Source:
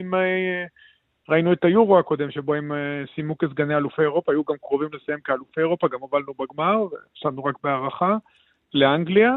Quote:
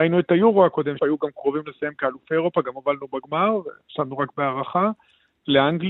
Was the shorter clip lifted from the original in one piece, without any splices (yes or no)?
no